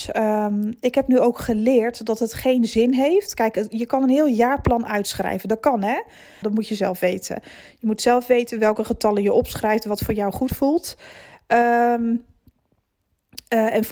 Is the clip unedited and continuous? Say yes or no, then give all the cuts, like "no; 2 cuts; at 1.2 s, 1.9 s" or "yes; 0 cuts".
no; 1 cut; at 6.4 s